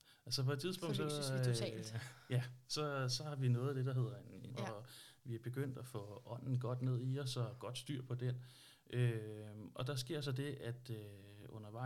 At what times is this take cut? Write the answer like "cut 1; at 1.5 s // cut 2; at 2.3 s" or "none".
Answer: cut 1; at 4.5 s